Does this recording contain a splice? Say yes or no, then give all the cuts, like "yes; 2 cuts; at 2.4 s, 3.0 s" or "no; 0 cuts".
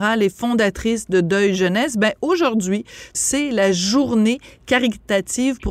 yes; 1 cut; at 3.1 s